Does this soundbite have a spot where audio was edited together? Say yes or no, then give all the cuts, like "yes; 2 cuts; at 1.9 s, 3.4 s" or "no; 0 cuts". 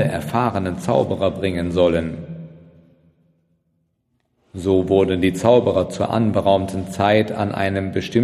no; 0 cuts